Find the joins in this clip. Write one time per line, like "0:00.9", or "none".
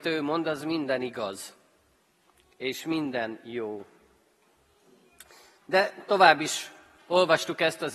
none